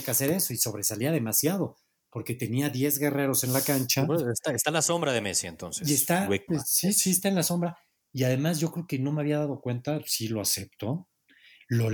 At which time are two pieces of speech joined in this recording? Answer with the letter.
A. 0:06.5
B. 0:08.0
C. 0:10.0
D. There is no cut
A